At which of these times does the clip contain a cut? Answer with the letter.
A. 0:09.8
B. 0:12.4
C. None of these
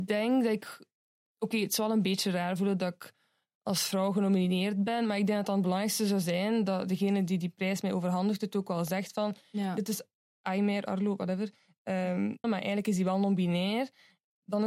B